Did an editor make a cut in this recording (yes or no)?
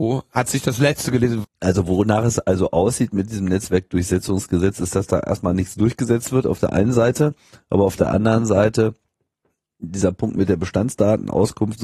yes